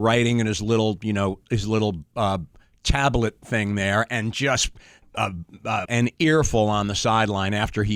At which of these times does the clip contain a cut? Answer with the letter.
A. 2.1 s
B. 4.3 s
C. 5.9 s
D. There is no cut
C